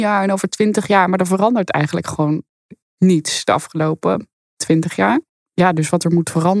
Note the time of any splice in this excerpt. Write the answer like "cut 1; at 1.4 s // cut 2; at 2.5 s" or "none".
none